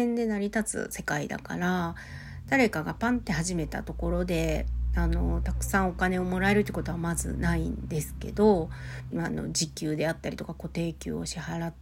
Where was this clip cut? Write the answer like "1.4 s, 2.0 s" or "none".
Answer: 9.1 s